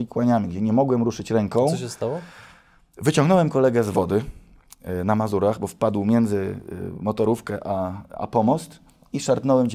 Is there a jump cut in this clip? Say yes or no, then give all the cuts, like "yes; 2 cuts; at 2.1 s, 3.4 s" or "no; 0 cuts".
no; 0 cuts